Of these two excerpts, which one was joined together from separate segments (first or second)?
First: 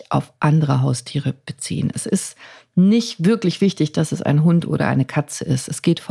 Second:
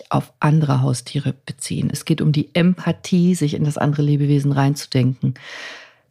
second